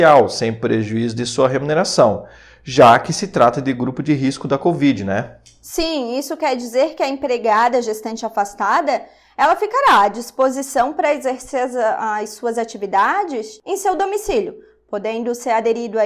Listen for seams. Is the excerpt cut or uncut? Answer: uncut